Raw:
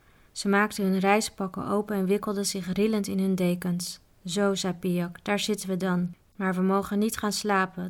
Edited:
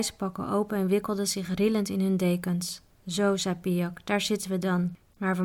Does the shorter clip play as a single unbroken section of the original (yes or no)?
yes